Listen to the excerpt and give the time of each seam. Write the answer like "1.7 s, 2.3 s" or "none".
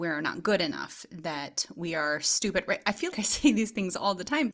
3.1 s